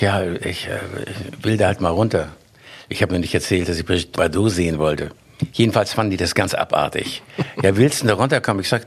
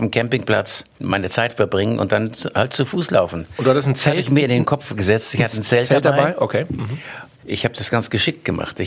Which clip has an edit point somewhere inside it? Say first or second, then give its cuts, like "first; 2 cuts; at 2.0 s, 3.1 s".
second; 1 cut; at 0.9 s